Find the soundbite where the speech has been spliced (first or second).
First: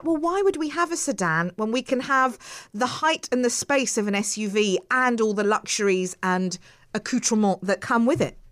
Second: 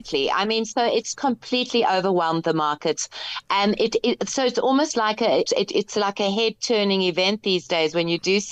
second